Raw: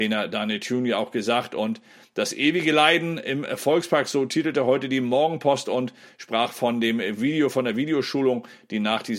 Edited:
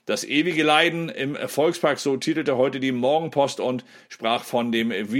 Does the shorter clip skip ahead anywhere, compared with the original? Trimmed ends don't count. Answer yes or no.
no